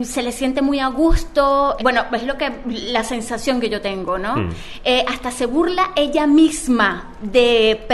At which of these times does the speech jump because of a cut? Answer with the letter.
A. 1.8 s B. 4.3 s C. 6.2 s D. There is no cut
A